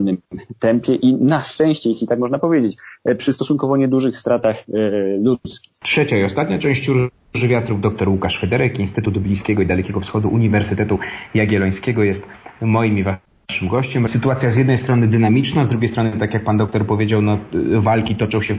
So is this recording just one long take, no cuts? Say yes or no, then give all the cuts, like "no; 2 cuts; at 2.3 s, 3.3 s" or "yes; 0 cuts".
no; 1 cut; at 14.1 s